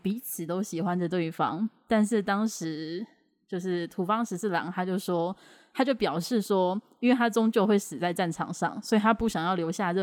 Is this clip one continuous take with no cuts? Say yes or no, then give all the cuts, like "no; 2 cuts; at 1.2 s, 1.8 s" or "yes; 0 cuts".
yes; 0 cuts